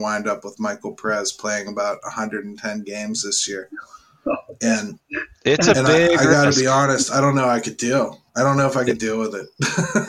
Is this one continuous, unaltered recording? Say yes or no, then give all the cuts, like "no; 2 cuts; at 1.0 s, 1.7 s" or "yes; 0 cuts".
yes; 0 cuts